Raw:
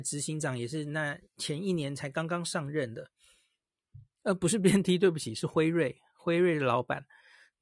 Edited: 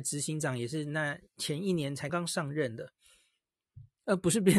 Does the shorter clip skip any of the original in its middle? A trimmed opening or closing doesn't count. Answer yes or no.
yes